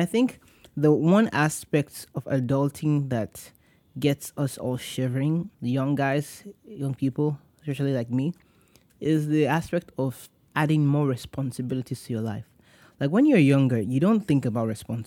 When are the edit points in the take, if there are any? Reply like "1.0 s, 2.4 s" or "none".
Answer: 5.5 s